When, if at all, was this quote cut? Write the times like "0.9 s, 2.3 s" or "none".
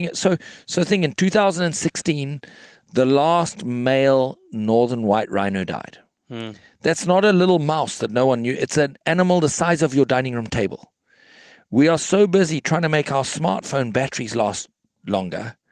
none